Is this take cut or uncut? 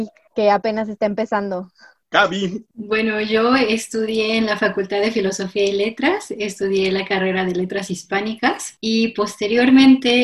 uncut